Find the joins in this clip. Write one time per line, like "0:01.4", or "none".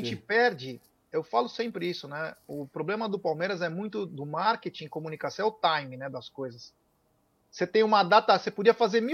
none